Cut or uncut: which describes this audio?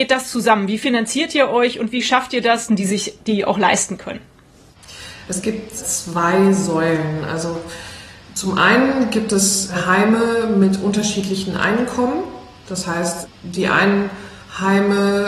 cut